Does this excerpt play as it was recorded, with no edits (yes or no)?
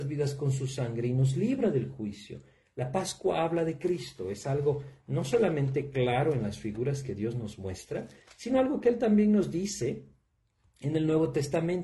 yes